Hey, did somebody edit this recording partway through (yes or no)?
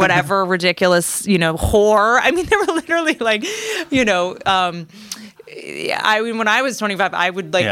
no